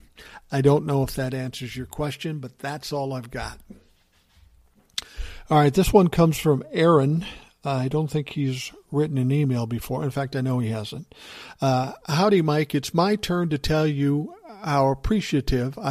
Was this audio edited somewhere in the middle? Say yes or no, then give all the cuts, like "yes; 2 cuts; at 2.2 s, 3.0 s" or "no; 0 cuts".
no; 0 cuts